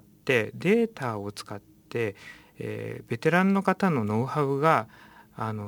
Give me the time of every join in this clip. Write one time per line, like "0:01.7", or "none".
none